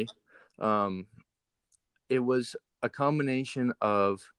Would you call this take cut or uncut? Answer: uncut